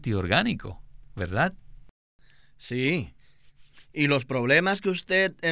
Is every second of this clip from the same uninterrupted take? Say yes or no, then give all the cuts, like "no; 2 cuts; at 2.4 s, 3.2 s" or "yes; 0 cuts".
yes; 0 cuts